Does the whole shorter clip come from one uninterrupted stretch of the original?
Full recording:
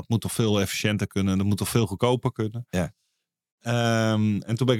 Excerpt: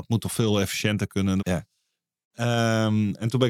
no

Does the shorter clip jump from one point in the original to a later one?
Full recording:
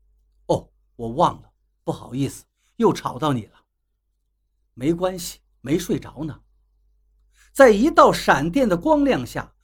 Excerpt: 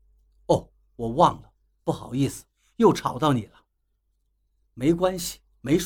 no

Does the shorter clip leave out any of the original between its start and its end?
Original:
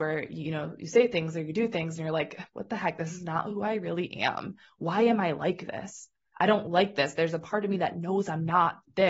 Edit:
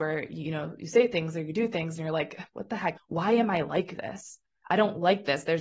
yes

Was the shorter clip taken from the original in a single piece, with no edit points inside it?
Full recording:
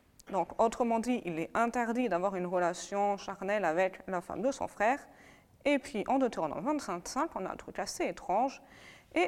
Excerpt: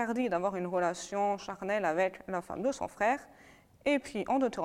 yes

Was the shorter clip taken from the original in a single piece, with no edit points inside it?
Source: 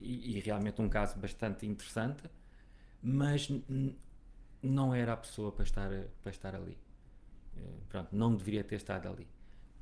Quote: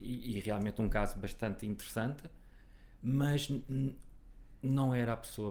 yes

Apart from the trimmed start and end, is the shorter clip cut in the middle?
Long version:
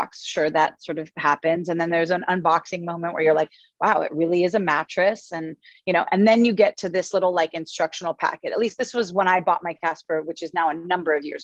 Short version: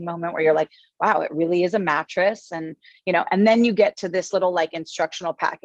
no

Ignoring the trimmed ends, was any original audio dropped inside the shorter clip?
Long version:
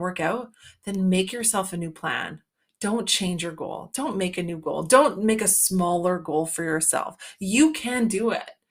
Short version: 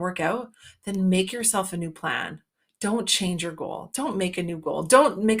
no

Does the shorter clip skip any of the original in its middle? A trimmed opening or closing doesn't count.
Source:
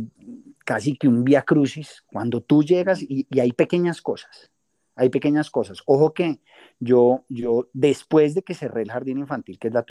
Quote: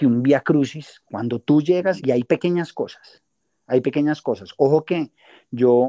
yes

